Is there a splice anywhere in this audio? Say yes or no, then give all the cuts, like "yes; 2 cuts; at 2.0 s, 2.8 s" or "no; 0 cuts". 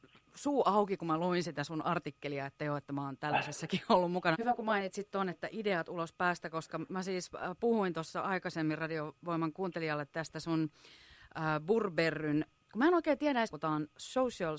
yes; 2 cuts; at 4.3 s, 13.5 s